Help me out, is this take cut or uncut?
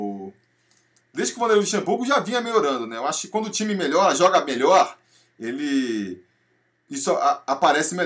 uncut